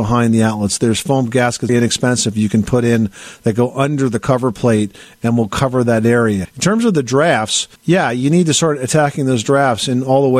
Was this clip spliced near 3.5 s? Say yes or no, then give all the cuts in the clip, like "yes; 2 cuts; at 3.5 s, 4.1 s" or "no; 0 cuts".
no; 3 cuts; at 1.7 s, 6.5 s, 7.8 s